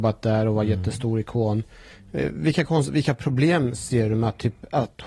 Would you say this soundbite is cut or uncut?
uncut